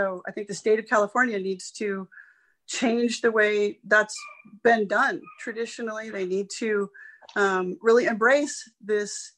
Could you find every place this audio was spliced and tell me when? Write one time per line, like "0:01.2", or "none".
none